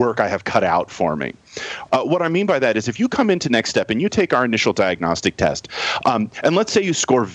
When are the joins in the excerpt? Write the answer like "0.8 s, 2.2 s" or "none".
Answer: 1.9 s